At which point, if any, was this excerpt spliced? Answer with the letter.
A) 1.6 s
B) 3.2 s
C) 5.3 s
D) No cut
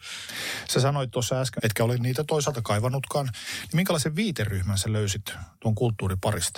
A